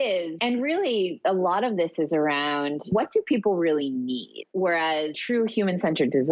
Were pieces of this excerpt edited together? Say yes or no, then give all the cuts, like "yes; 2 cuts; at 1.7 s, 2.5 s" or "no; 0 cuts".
yes; 1 cut; at 4.5 s